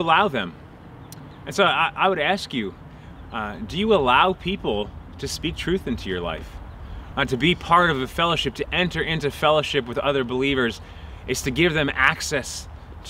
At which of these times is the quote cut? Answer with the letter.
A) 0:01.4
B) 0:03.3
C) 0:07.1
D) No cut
C